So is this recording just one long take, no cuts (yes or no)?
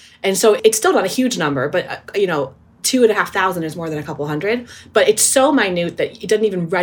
yes